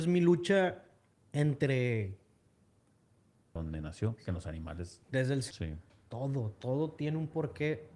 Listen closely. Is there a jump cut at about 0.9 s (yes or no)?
no